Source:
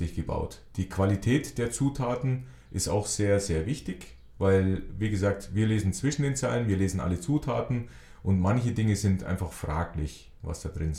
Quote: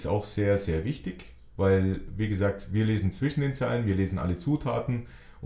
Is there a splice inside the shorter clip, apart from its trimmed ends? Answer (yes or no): no